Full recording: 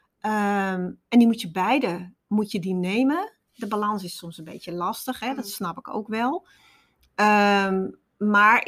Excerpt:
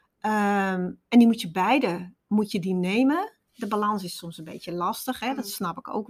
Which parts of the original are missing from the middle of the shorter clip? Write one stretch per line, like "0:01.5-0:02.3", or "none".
none